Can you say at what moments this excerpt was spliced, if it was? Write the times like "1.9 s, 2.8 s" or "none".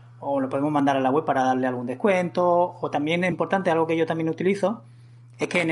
3.3 s

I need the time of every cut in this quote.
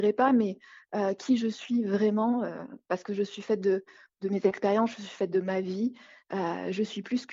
none

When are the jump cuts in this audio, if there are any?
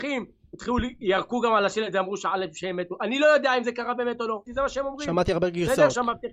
4.5 s

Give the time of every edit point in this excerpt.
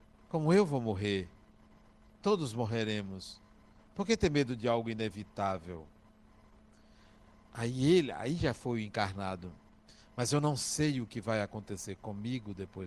none

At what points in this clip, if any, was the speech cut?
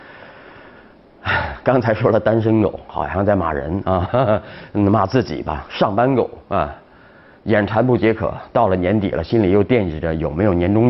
none

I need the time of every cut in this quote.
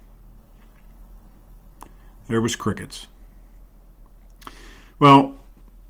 none

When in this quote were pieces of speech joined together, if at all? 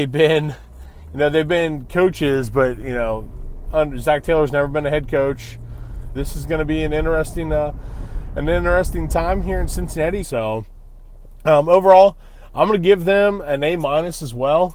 6.1 s, 10.2 s

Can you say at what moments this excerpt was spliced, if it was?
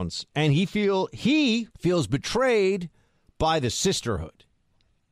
1.7 s

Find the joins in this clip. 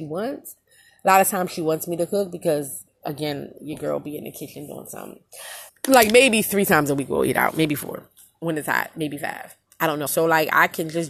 3.0 s, 5.7 s, 10.1 s

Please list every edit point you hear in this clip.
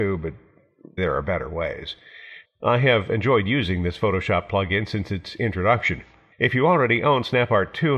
1.0 s, 2.4 s, 6.3 s

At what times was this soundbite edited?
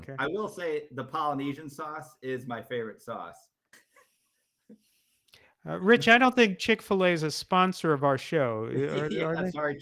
3.7 s

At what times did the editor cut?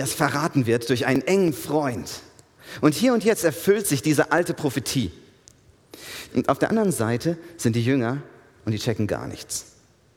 6.3 s

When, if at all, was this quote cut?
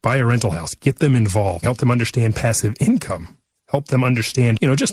1.6 s

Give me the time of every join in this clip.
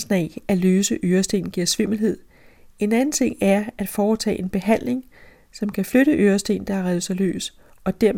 none

